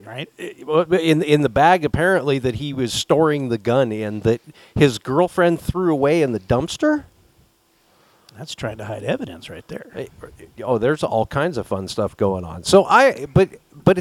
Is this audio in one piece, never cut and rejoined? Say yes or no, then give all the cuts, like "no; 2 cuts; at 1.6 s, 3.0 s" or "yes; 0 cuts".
yes; 0 cuts